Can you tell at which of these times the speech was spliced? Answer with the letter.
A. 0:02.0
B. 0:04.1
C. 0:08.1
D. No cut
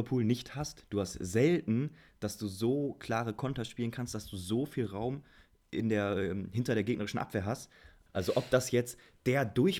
C